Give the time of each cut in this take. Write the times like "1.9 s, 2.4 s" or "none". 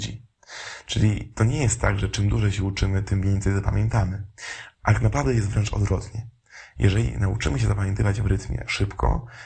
none